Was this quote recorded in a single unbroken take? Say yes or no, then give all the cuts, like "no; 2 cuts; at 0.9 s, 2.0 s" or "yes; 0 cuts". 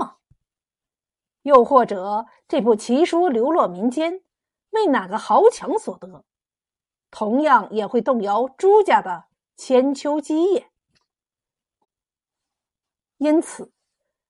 yes; 0 cuts